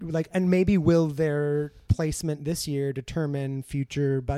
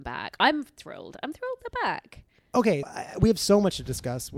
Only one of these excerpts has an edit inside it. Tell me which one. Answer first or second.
second